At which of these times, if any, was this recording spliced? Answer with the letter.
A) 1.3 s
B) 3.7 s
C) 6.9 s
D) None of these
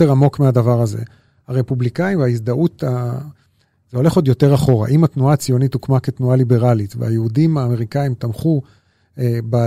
D